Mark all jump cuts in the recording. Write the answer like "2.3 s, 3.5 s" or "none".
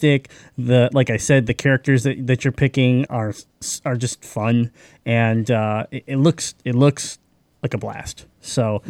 3.1 s